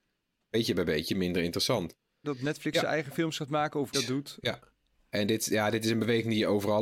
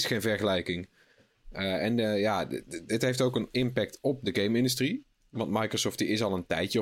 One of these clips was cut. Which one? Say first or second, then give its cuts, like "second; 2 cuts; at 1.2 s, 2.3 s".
first; 2 cuts; at 2.2 s, 3.9 s